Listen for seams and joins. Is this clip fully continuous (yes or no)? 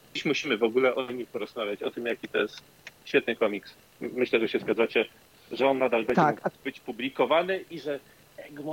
yes